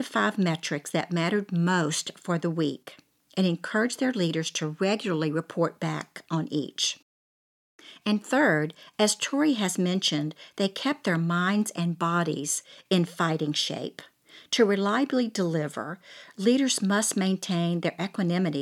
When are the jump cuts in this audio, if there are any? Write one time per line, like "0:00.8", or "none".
none